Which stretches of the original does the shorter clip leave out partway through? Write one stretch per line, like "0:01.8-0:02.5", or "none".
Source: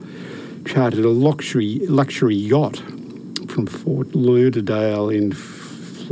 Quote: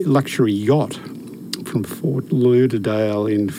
none